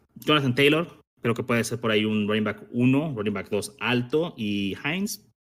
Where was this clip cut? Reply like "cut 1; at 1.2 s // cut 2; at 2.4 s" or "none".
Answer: none